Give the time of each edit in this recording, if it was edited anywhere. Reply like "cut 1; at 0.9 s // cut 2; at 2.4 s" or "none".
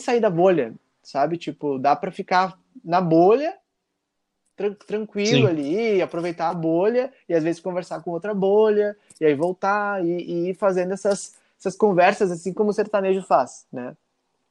none